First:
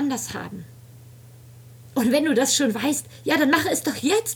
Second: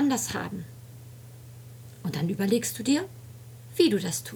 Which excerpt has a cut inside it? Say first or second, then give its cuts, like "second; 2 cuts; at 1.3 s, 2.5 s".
first; 1 cut; at 1.9 s